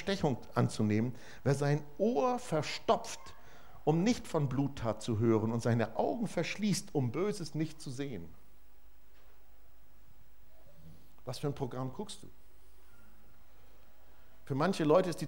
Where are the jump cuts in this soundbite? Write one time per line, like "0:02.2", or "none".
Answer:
none